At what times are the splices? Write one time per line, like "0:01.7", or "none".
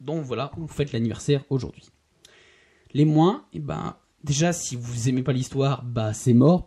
none